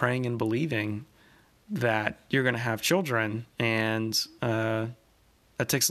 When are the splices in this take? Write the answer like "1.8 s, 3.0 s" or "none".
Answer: 3.5 s